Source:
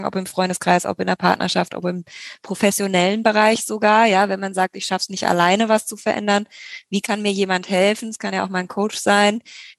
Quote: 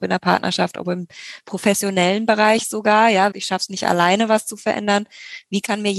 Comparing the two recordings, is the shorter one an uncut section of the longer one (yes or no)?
no